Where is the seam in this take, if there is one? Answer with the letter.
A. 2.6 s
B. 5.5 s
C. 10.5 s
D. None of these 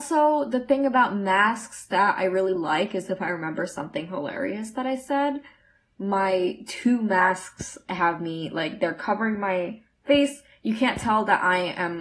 D